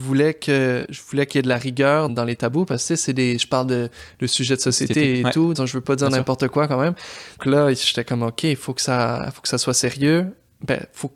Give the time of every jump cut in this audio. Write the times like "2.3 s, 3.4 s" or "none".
2.1 s, 5.5 s, 7.4 s